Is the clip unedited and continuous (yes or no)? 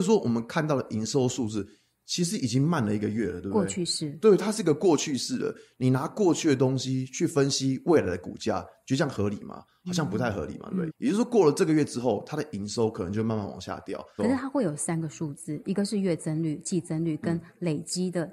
no